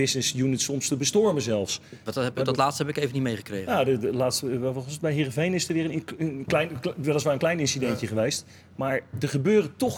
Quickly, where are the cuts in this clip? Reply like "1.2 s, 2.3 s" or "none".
2.1 s